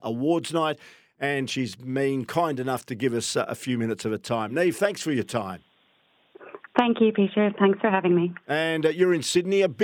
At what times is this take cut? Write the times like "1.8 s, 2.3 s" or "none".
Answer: none